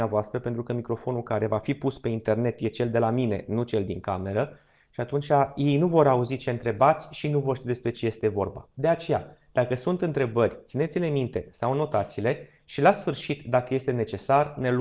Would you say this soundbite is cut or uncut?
uncut